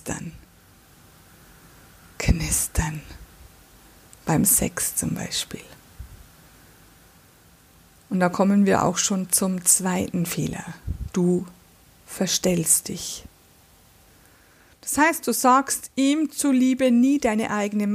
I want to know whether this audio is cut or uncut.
uncut